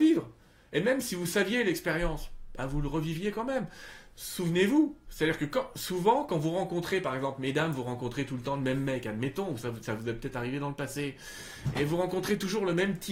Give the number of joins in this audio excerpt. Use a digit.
0